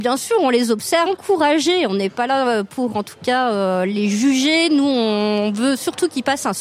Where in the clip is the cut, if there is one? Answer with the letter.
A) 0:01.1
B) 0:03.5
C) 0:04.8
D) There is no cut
A